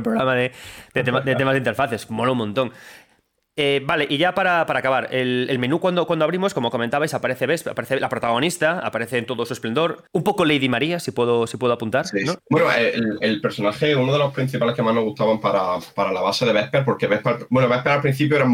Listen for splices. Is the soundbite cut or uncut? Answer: cut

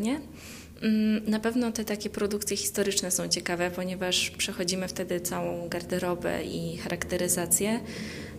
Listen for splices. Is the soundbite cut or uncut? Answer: uncut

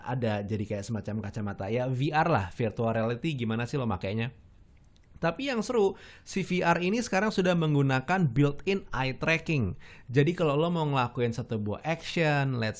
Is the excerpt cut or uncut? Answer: uncut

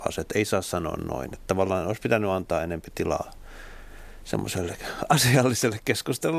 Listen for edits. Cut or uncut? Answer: uncut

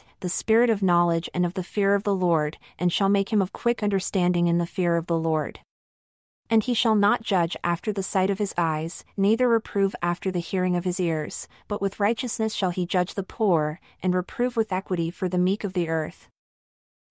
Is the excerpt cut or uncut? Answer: uncut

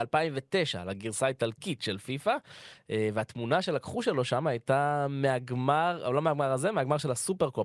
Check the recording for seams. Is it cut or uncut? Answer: uncut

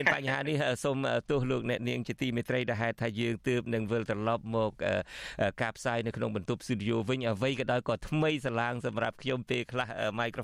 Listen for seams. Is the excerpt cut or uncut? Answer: uncut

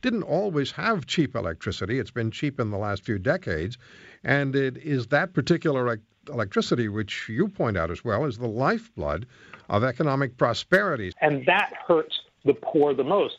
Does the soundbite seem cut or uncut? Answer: cut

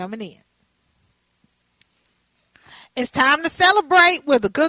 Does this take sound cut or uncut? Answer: uncut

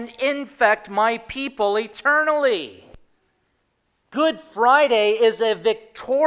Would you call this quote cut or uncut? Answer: cut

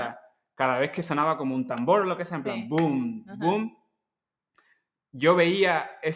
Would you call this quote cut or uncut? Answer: uncut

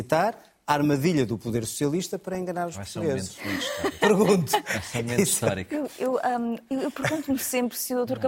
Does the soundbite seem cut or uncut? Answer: cut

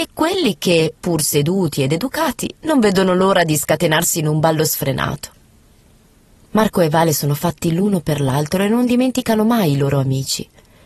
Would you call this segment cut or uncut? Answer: uncut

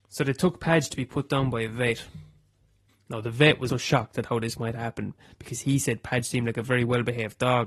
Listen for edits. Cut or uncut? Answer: cut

